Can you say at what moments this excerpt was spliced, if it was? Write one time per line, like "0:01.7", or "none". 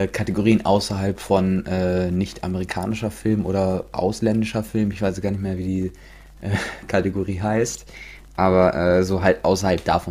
none